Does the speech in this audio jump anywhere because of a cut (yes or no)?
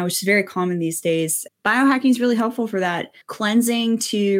yes